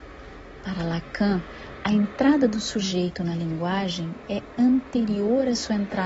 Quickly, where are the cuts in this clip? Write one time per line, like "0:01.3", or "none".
none